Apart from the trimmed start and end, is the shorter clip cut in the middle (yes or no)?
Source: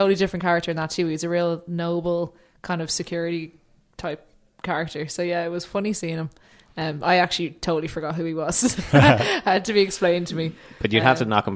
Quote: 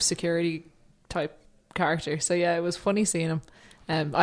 no